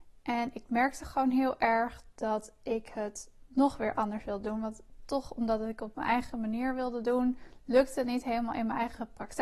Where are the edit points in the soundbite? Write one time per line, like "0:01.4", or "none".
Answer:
none